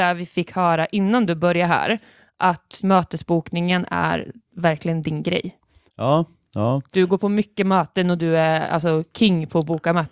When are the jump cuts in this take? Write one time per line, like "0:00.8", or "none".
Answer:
0:02.8